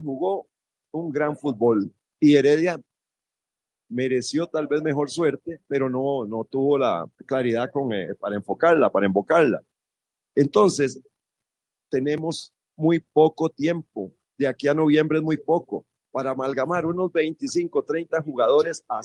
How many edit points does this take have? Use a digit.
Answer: 1